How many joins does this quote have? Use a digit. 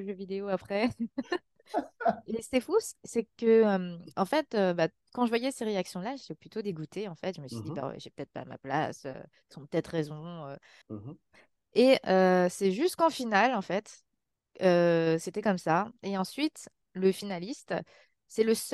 1